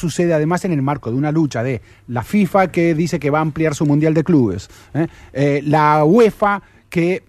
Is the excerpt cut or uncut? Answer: uncut